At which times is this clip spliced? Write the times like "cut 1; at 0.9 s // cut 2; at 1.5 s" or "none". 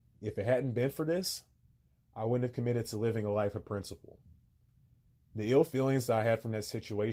none